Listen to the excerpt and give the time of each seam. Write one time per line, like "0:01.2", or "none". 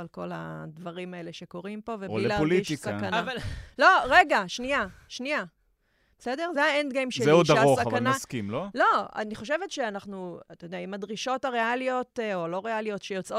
none

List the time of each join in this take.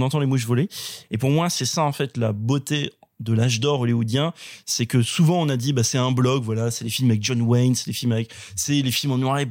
0:01.0

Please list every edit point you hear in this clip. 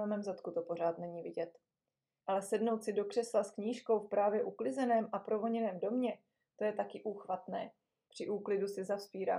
0:02.2
0:08.1

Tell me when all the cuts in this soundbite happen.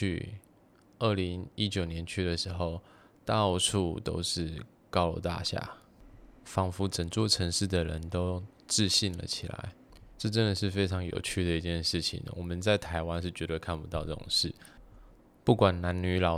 0:10.1

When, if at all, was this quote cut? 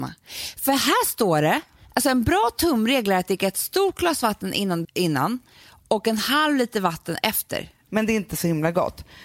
0:04.8
0:07.9

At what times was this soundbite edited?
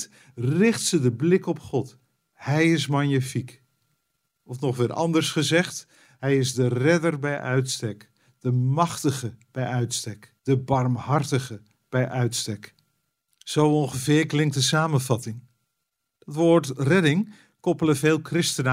0:10.4

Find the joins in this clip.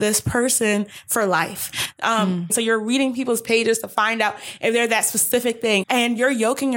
0:02.5
0:05.8

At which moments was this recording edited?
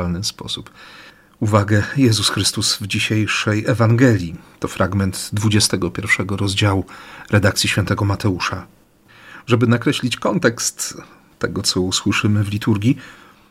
none

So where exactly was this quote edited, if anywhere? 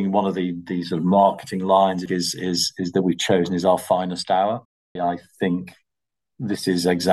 0:02.1
0:05.0

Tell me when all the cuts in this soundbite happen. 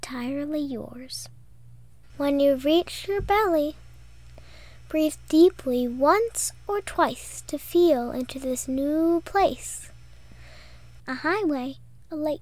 0:02.1
0:11.0

